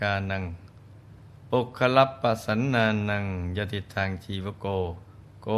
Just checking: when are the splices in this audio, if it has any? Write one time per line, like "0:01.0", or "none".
0:01.4